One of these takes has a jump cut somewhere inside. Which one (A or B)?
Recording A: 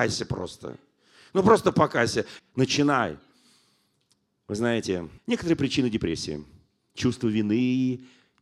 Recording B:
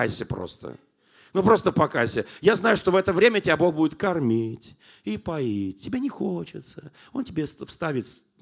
A